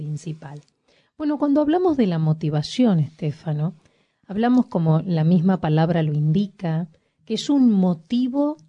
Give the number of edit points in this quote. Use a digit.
0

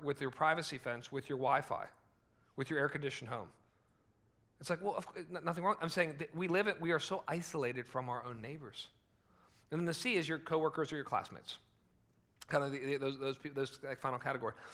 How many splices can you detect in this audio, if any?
0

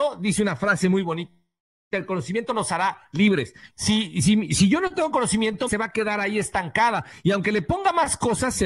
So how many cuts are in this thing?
2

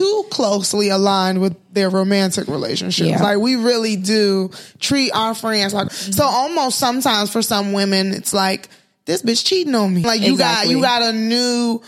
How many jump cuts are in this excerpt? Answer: 2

